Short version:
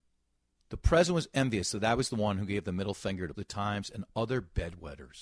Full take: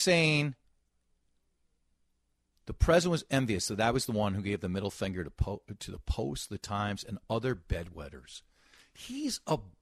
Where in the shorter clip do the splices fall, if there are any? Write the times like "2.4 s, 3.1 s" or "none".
3.3 s